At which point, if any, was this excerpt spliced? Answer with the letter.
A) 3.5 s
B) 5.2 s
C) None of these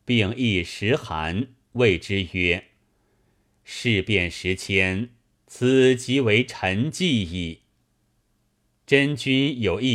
C